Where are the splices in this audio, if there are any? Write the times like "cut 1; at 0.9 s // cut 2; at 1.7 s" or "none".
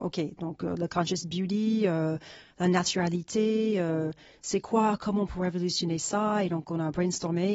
none